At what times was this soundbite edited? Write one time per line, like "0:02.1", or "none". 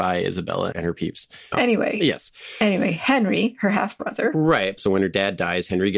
0:04.8